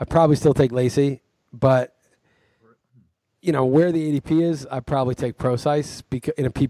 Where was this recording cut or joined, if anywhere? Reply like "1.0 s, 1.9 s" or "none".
none